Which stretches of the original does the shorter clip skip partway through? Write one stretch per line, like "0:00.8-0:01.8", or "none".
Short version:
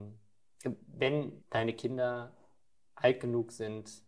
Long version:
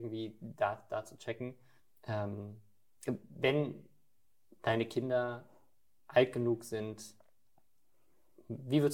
0:03.8-0:04.5